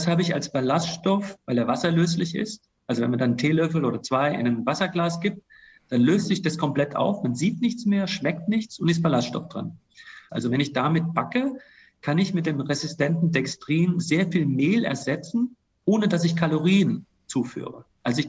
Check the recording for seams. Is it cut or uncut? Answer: cut